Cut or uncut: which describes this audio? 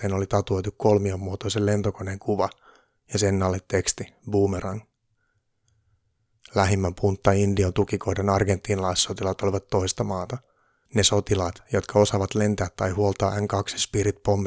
cut